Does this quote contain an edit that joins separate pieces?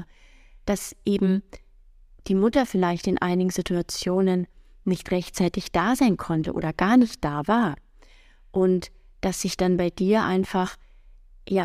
no; 0 cuts

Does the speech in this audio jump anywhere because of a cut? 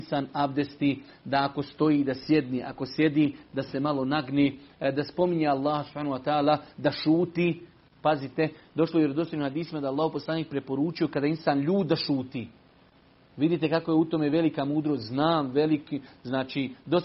no; 0 cuts

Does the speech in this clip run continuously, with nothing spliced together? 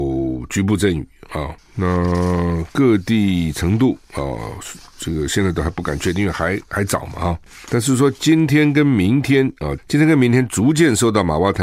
no; 1 cut; at 9.8 s

